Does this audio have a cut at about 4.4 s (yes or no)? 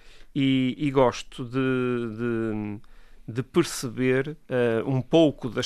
yes